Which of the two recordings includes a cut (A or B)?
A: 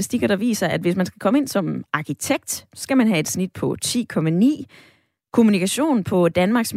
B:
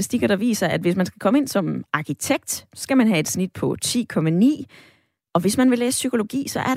B